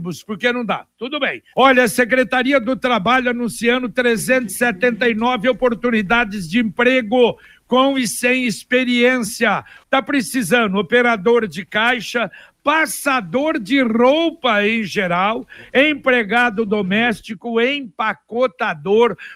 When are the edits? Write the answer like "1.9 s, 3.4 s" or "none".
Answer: 1.5 s, 9.8 s